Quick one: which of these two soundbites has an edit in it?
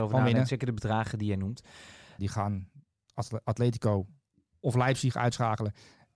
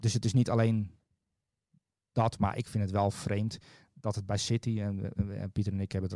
first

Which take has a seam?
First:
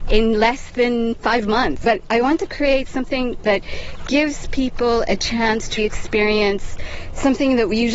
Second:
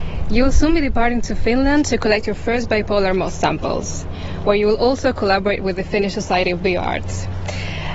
first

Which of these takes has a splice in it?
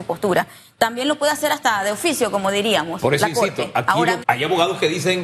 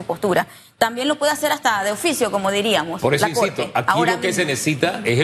first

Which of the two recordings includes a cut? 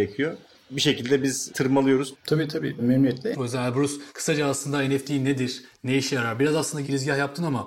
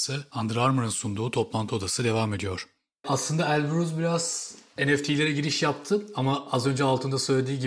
first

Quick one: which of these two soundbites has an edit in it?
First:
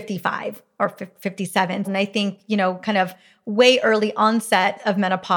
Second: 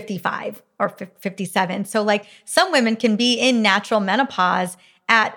first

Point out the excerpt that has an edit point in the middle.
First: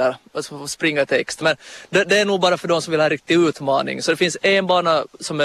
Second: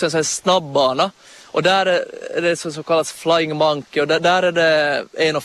first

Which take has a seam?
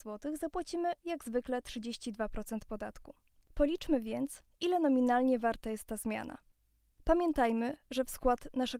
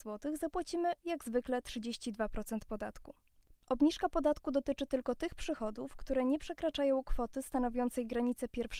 second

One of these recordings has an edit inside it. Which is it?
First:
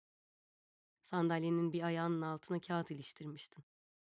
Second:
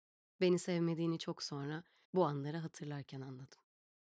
second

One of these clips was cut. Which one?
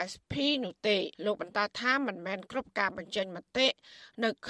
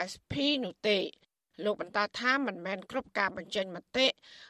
first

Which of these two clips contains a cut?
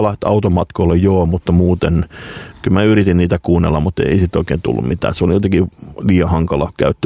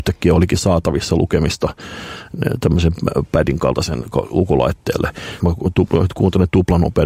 second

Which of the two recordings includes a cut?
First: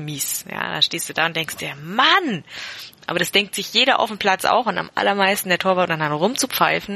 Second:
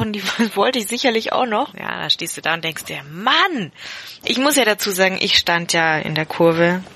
second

